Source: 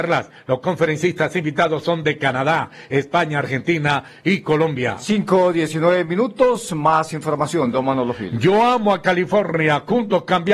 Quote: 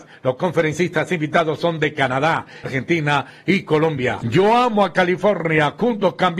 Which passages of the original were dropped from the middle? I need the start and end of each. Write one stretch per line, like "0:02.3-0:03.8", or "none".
0:02.9-0:03.4
0:05.0-0:08.3